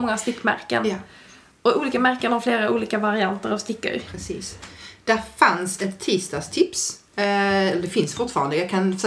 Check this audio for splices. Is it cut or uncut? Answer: uncut